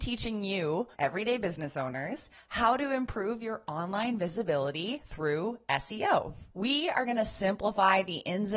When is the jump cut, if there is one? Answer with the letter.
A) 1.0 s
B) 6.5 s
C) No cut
B